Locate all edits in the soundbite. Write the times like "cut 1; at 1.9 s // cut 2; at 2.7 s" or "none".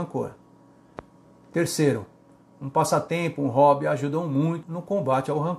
cut 1; at 4.6 s